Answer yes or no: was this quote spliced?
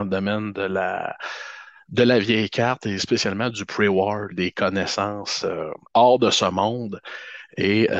yes